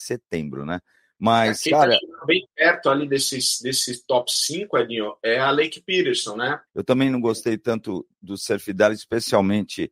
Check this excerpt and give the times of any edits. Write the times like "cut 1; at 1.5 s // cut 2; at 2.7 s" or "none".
cut 1; at 6.7 s